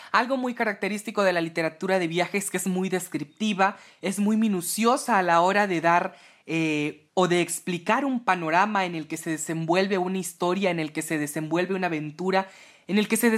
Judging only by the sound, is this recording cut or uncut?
cut